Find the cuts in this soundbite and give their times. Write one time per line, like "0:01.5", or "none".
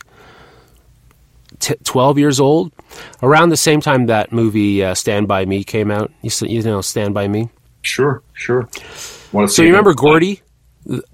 none

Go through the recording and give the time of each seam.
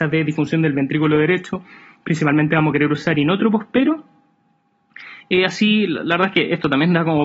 none

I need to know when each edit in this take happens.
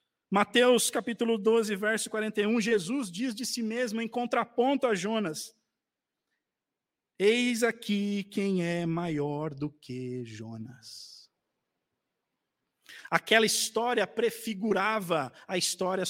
none

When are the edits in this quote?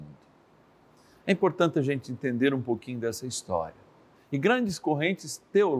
0:04.1

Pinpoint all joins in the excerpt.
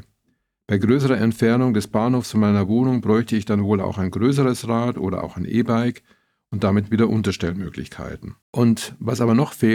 0:08.4

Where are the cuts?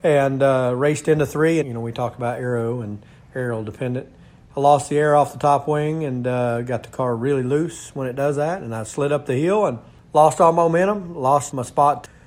0:01.6

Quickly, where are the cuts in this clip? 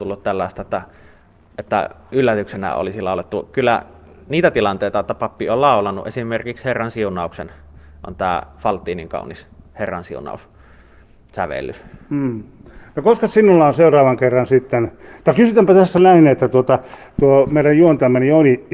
none

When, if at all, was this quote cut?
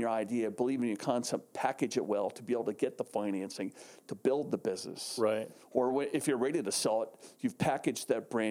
none

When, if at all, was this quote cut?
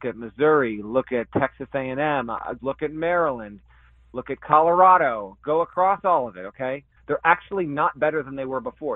0:02.6
0:07.0

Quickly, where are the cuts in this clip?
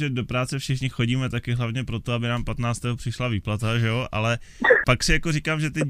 0:04.8

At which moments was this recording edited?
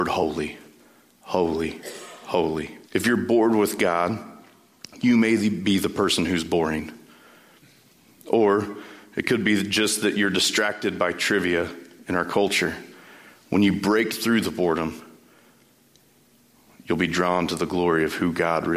0:02.8

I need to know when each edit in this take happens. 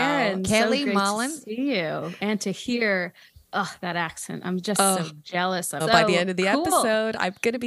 0:05.8

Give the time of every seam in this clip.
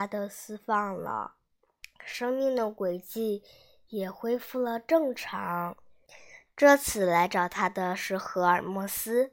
0:01.8
0:06.5

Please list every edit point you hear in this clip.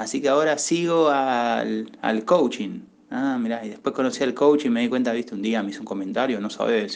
none

